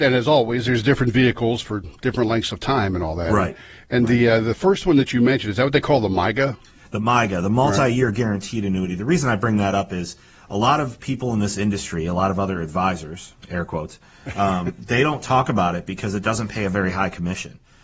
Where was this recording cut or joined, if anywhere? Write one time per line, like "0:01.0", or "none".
none